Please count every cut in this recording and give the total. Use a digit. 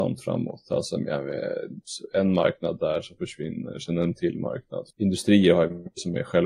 2